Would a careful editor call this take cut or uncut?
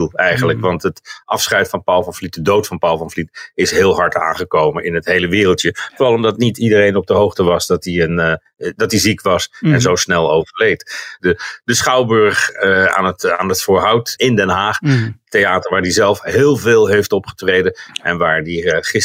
cut